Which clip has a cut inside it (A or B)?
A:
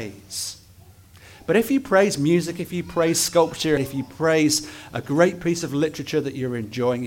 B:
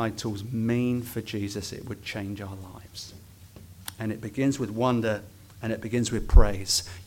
A